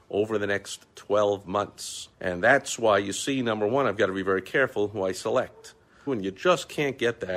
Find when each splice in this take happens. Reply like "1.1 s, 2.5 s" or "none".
2.1 s, 6.1 s